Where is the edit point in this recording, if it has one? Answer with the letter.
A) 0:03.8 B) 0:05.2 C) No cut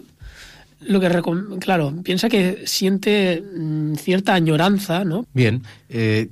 B